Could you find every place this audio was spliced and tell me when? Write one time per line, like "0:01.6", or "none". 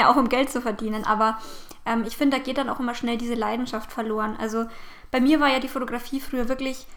none